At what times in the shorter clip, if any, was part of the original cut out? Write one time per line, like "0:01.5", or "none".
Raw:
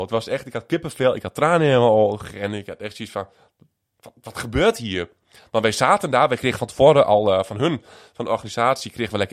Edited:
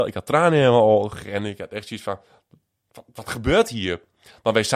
none